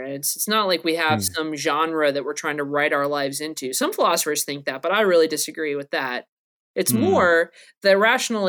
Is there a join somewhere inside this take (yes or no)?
no